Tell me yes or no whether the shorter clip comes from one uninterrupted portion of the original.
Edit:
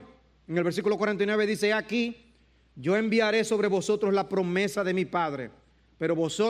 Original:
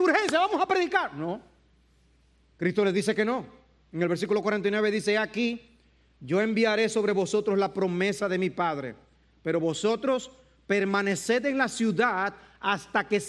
yes